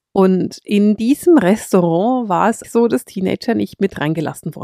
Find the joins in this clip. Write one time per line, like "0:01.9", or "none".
0:02.6